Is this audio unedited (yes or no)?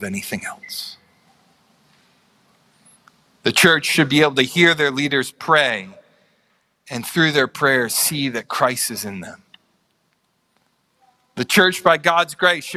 yes